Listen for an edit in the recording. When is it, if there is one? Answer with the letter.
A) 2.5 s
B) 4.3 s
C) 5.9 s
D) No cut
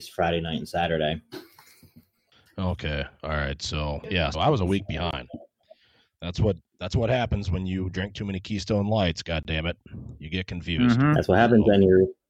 B